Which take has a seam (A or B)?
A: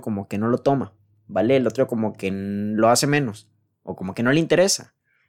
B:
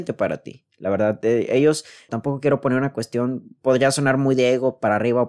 B